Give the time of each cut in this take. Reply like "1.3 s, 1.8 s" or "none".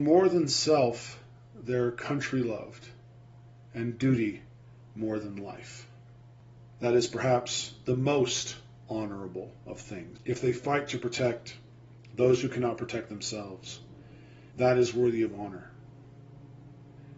6.8 s, 10.2 s, 14.5 s

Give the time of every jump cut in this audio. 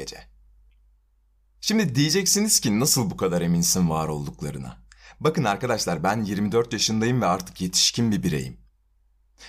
none

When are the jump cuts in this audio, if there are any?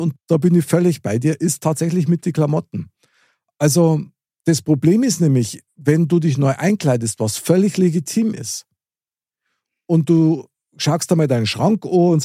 none

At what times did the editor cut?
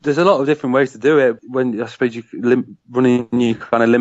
1.4 s

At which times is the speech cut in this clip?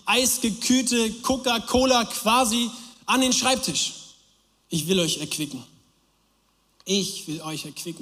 4.6 s

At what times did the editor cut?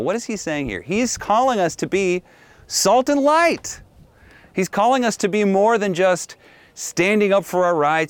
none

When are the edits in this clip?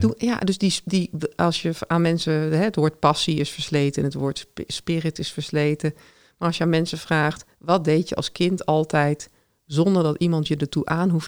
none

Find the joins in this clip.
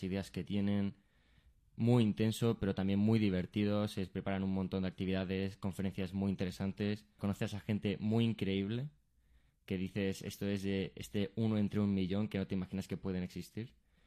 7.2 s

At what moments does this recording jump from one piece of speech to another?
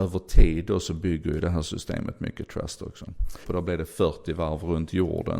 3.4 s

